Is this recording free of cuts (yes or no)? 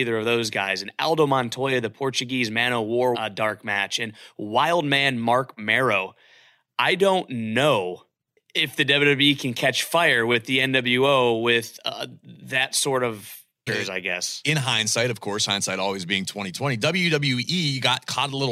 no